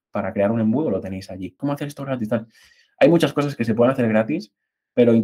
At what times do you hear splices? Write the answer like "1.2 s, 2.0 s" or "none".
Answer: 1.6 s